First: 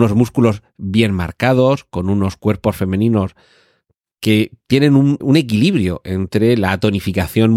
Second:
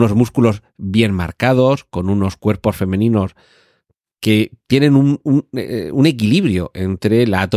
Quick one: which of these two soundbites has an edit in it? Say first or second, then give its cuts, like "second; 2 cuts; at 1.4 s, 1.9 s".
first; 1 cut; at 5.2 s